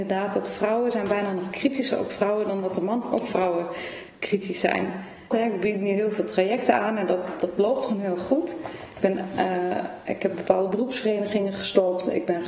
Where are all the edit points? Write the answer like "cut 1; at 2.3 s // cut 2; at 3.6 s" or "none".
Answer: cut 1; at 5.3 s